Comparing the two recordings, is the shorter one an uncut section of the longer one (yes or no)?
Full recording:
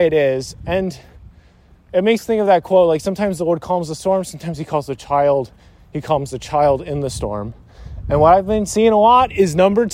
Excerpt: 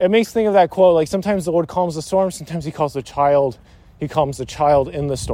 yes